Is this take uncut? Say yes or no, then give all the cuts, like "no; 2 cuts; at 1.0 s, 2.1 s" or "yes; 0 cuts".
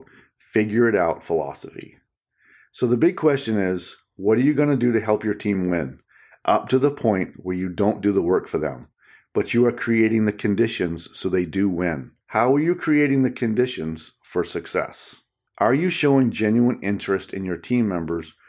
no; 2 cuts; at 12.2 s, 15.5 s